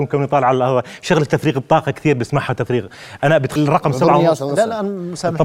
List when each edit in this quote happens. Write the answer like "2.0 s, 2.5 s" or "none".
3.6 s